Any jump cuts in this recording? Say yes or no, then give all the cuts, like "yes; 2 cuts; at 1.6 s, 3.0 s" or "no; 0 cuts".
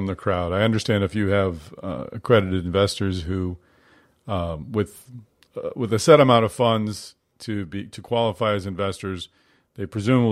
no; 0 cuts